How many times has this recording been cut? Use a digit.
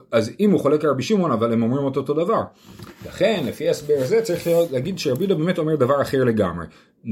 0